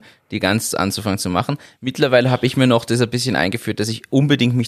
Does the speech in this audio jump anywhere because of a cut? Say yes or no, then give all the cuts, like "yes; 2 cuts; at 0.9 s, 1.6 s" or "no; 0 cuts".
no; 0 cuts